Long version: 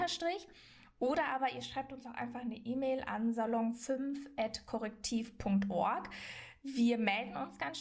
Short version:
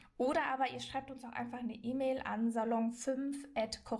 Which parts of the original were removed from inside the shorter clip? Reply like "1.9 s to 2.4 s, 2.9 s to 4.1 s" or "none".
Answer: none